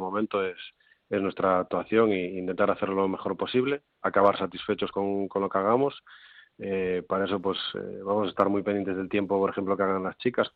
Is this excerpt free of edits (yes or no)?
yes